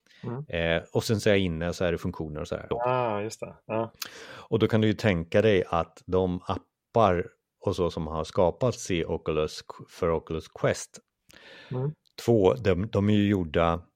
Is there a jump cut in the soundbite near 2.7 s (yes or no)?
yes